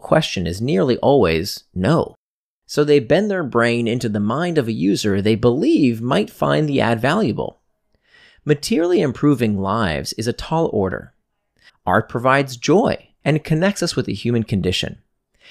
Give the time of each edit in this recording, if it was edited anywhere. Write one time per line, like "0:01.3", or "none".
0:11.7
0:13.2

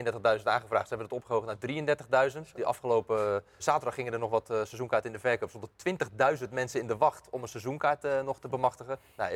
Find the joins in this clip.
0:03.6

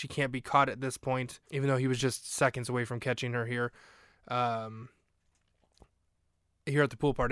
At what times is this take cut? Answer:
0:01.4

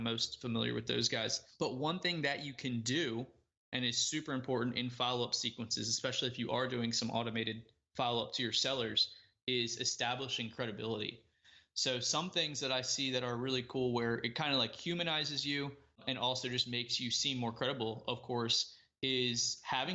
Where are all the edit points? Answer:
none

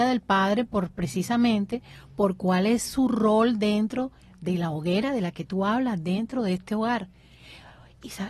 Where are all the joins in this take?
none

